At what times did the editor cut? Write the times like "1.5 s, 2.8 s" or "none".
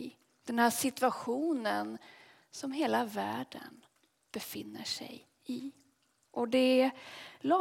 6.2 s